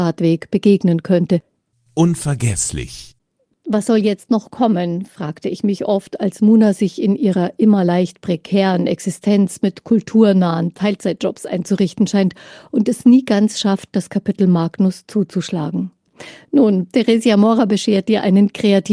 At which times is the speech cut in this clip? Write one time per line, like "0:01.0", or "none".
0:01.7